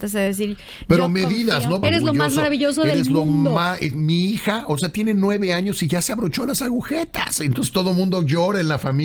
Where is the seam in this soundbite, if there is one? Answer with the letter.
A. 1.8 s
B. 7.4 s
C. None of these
A